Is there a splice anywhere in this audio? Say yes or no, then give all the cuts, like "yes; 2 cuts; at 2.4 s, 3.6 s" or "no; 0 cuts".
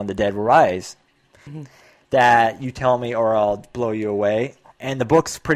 yes; 1 cut; at 1.5 s